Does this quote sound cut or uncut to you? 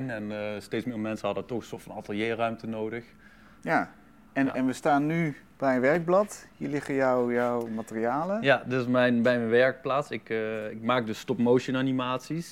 cut